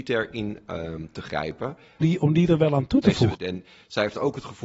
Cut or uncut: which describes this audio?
cut